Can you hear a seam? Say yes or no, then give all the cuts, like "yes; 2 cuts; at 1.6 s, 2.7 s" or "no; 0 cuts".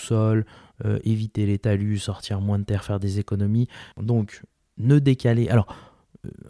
yes; 1 cut; at 3.9 s